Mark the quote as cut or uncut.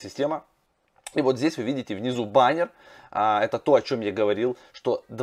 uncut